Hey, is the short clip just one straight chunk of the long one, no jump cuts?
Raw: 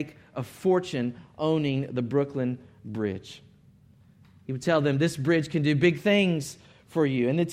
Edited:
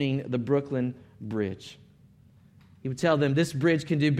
yes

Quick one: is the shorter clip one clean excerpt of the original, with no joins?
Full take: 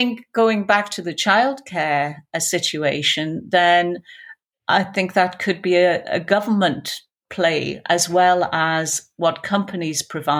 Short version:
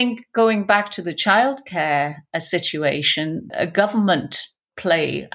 no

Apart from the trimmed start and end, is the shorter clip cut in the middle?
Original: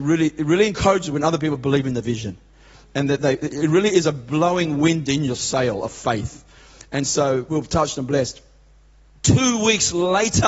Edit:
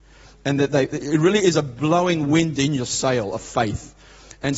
no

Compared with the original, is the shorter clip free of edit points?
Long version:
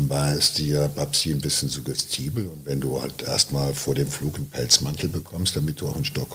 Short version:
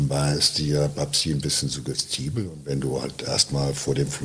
yes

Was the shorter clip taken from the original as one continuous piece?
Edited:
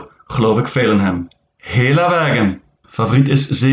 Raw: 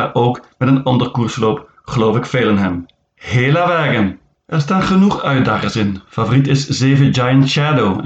no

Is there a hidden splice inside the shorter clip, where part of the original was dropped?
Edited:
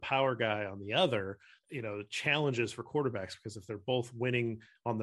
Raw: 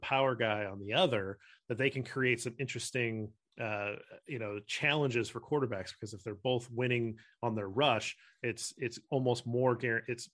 yes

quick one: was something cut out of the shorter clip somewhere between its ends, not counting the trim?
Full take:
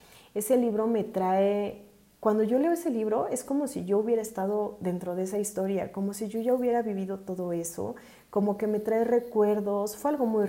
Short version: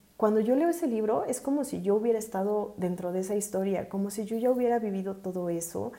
no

